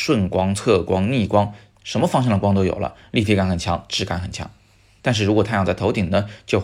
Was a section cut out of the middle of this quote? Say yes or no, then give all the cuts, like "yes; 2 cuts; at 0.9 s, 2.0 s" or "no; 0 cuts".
no; 0 cuts